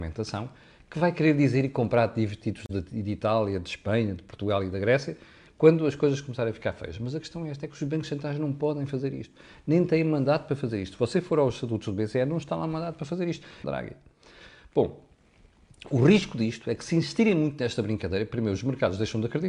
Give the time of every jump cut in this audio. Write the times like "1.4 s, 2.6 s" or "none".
13.6 s